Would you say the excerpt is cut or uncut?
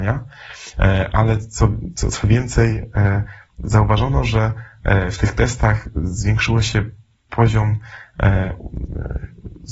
uncut